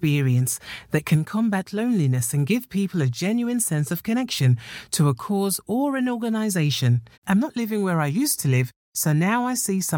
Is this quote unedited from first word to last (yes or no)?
no